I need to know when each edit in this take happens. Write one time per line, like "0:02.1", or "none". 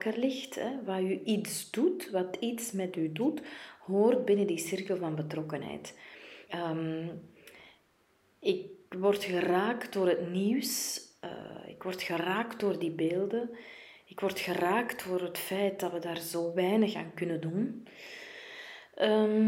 0:06.5